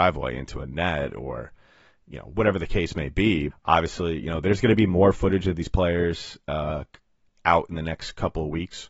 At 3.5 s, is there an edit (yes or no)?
yes